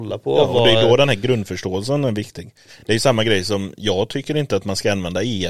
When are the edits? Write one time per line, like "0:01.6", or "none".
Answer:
none